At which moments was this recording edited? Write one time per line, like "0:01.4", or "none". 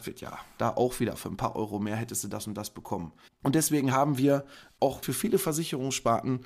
0:03.3
0:05.0